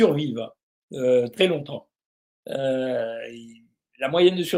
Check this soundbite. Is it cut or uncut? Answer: uncut